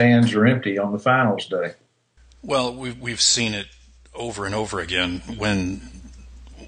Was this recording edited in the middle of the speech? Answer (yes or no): no